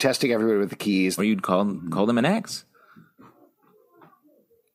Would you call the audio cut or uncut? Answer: cut